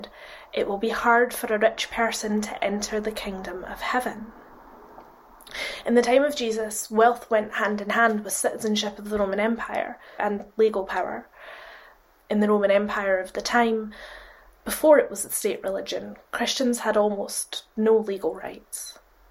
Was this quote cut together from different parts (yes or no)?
yes